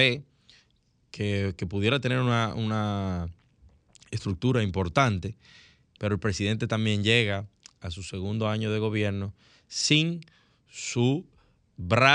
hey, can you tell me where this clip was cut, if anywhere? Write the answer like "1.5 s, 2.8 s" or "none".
6.0 s

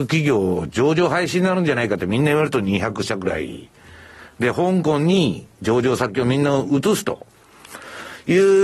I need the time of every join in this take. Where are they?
none

